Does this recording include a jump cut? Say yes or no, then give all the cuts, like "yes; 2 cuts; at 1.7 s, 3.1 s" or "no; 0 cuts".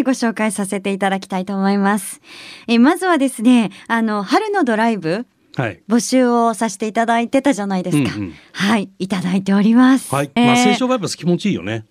yes; 1 cut; at 10.4 s